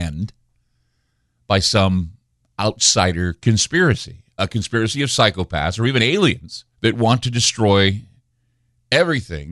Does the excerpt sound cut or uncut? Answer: cut